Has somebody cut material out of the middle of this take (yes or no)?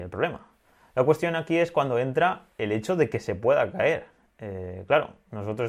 yes